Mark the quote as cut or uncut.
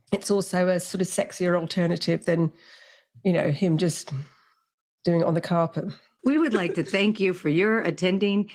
cut